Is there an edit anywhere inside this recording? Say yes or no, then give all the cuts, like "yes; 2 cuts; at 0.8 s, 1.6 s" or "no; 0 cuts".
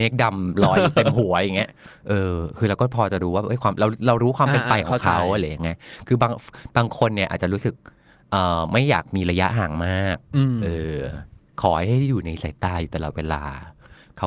no; 0 cuts